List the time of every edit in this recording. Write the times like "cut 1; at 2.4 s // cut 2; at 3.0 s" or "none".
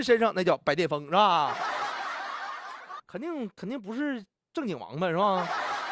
cut 1; at 3.0 s